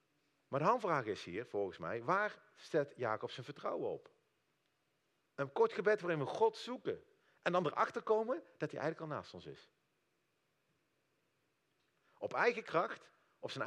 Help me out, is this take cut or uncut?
cut